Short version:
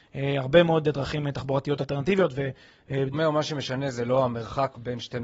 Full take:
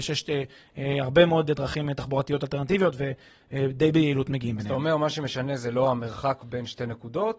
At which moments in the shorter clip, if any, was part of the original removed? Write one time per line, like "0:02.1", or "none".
0:03.1